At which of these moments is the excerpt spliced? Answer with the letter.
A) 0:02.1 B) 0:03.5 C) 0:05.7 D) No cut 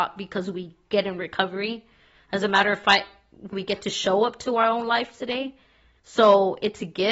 B